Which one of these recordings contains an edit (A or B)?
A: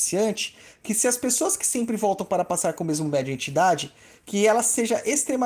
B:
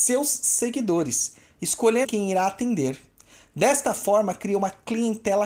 B